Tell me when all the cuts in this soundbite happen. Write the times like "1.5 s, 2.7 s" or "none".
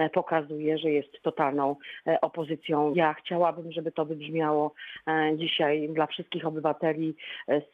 2.9 s